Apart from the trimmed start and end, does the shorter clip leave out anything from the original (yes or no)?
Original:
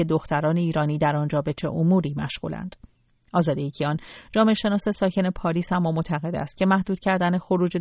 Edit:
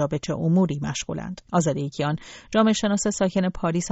yes